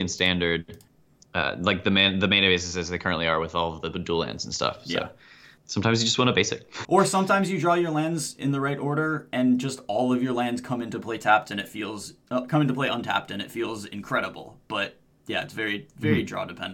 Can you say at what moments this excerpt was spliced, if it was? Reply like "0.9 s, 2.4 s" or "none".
6.8 s